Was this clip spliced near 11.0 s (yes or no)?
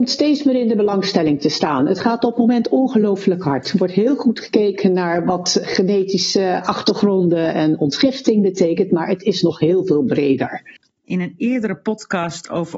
yes